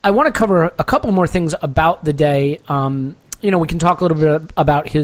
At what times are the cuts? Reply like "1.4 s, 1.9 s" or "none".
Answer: none